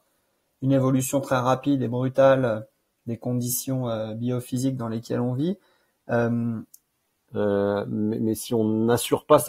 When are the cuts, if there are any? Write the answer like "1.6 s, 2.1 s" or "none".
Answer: 7.3 s